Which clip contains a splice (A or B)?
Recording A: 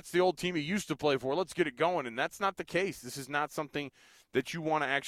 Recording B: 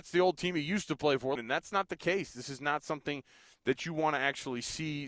B